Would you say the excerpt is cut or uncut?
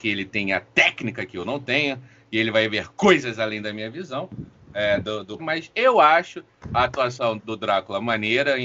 cut